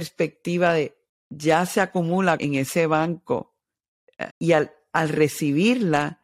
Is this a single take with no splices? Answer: no; 3 cuts; at 1.1 s, 2.4 s, 4.3 s

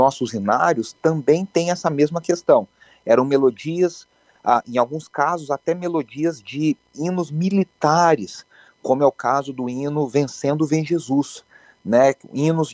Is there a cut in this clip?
no; 0 cuts

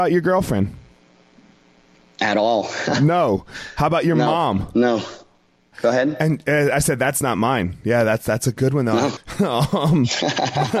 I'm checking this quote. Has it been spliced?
yes; 2 cuts; at 5.7 s, 9.2 s

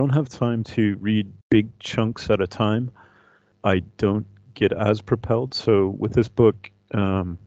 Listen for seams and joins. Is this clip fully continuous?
no; 2 cuts; at 1.4 s, 3.5 s

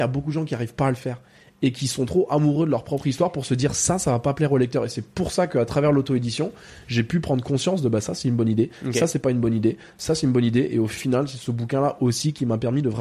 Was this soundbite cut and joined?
no; 0 cuts

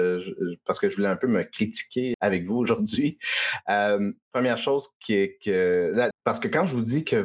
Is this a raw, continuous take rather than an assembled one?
no; 2 cuts; at 2.1 s, 6.1 s

